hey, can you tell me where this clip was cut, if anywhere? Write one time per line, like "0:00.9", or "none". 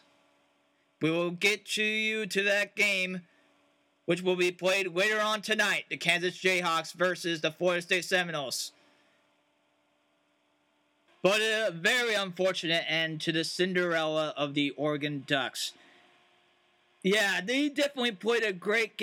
0:11.1